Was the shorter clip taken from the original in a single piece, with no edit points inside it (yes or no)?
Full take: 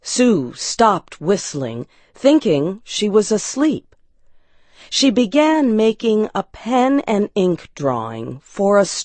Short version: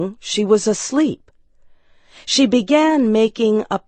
yes